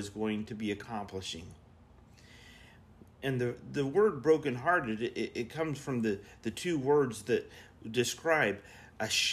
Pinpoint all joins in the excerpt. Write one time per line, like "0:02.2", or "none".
0:03.0